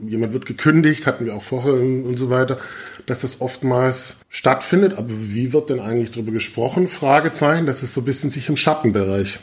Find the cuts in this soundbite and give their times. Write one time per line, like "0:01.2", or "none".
0:04.2